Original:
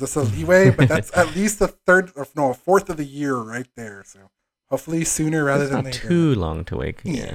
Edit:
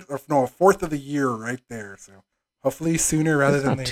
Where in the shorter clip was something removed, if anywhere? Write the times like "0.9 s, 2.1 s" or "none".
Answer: none